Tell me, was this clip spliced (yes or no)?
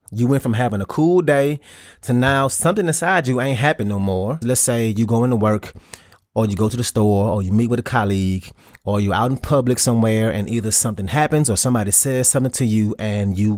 yes